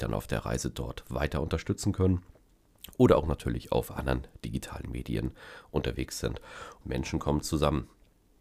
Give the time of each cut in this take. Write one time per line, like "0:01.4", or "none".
0:06.8